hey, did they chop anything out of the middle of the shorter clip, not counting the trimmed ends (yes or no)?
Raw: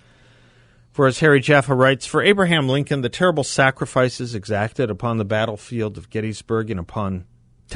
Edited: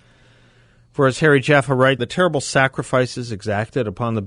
yes